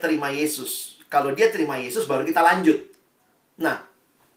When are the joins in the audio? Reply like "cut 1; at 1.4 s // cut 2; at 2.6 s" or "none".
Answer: none